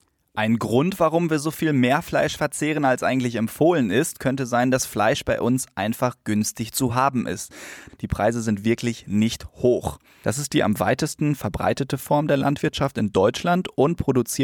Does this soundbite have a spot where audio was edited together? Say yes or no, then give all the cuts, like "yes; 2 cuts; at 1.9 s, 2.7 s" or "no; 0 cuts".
yes; 2 cuts; at 7.9 s, 10.2 s